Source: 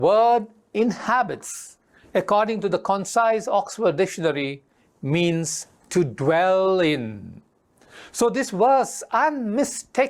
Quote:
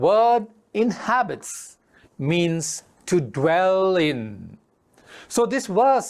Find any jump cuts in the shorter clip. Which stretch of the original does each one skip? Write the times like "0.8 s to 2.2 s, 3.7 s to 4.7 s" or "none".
2.0 s to 4.9 s